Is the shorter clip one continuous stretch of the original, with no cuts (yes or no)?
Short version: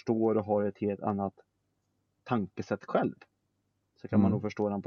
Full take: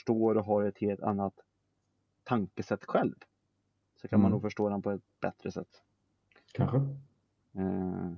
yes